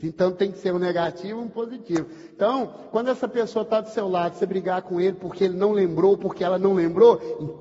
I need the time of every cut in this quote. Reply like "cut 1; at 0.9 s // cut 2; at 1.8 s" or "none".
none